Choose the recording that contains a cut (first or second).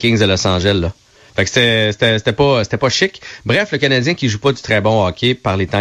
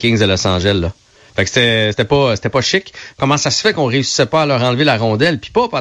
second